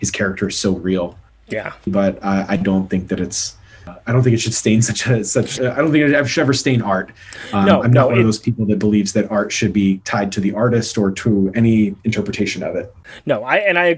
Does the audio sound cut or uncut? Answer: cut